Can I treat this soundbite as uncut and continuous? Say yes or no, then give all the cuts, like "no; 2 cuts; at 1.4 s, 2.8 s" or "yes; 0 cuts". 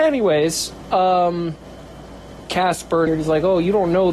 no; 1 cut; at 3.1 s